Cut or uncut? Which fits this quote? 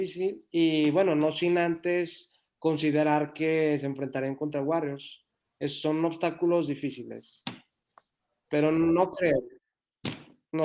uncut